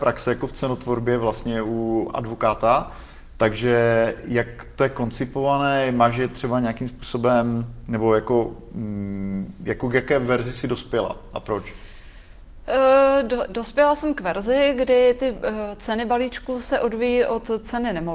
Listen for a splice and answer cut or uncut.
cut